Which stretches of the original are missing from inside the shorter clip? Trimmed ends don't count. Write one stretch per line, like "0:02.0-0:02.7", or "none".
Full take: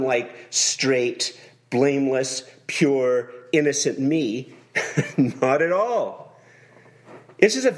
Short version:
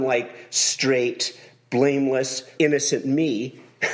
0:02.6-0:03.5